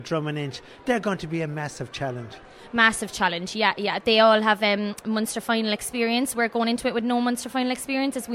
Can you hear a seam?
no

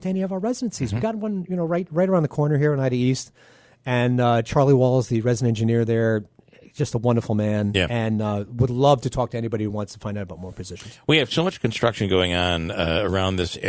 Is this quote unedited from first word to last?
yes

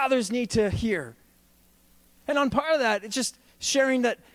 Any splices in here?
no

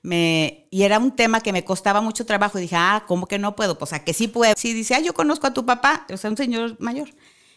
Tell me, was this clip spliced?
yes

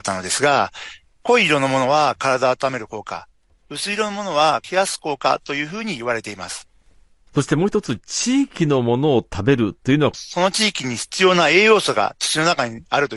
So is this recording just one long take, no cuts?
no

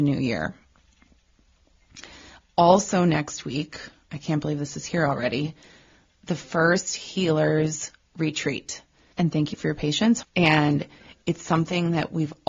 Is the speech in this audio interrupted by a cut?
yes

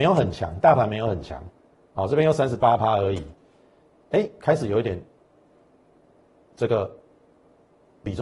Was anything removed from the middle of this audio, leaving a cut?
no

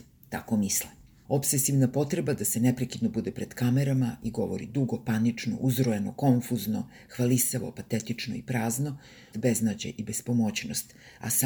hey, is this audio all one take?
no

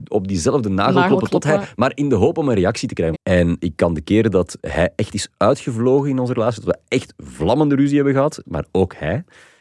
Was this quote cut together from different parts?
yes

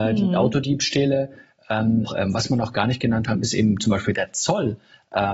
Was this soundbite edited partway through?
yes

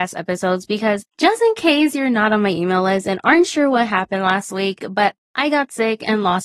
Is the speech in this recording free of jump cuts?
no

